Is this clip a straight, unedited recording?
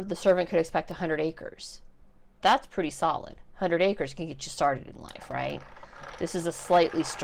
yes; 0 cuts

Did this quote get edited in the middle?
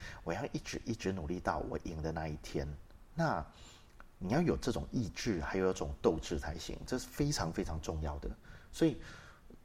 no; 0 cuts

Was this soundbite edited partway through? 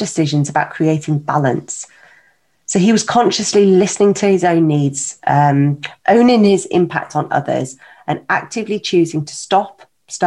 no; 0 cuts

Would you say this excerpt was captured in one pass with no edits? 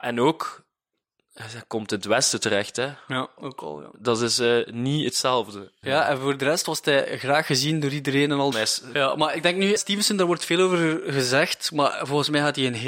no; 3 cuts; at 5.8 s, 8.5 s, 9.8 s

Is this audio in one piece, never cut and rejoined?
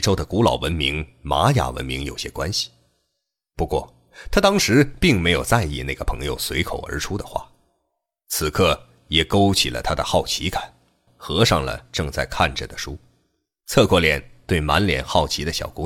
no; 1 cut; at 11.1 s

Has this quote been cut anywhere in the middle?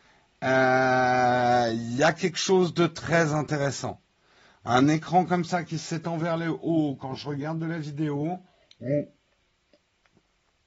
no; 0 cuts

